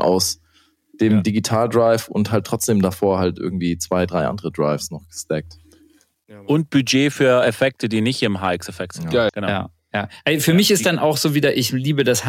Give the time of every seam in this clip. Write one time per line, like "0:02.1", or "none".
0:09.3